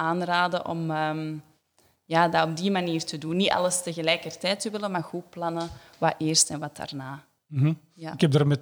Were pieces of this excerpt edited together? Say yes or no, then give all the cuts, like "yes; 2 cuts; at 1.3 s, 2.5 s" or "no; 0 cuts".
no; 0 cuts